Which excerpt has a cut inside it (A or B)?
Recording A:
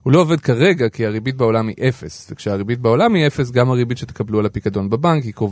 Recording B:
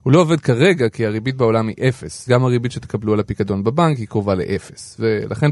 B